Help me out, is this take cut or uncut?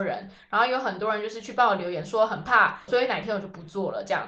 cut